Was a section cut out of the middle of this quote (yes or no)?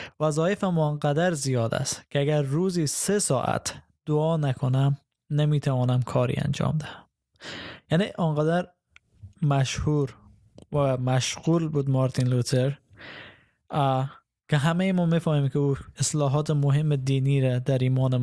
no